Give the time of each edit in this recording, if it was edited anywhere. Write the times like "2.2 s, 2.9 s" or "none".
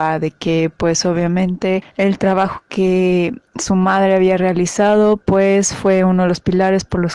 3.5 s